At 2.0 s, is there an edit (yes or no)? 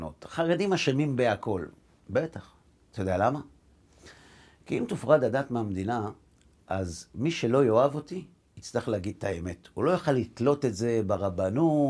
yes